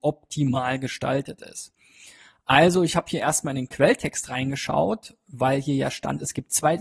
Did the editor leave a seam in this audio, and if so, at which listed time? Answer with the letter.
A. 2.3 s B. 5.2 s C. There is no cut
C